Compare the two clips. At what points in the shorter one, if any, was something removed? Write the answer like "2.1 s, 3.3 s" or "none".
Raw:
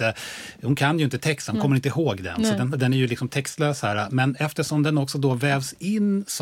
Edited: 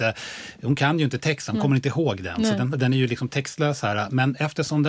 none

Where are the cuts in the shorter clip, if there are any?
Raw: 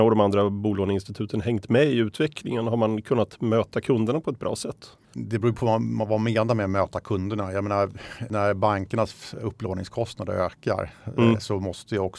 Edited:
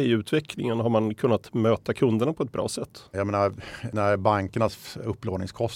3.1 s

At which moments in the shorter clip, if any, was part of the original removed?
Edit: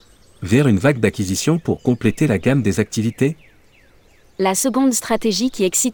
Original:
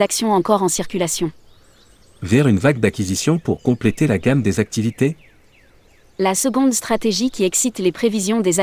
none

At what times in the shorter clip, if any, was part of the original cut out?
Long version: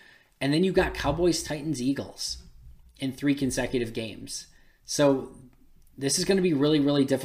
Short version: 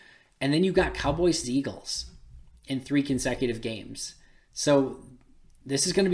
1.4 s

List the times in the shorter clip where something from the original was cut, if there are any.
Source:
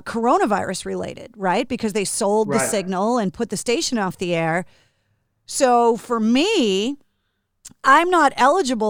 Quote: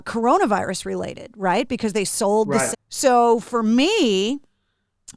2.7 s

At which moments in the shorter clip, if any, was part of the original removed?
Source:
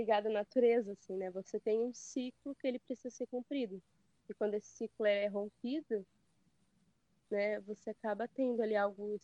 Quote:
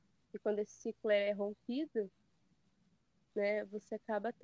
none

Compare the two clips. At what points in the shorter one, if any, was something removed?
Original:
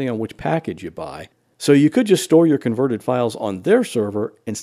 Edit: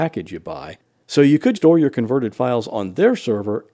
1.6 s

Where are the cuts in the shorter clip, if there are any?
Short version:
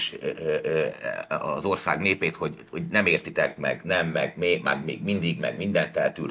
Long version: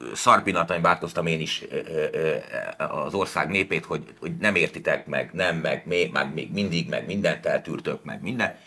none

